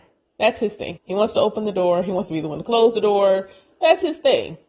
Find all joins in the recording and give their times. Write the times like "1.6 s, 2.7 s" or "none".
1.0 s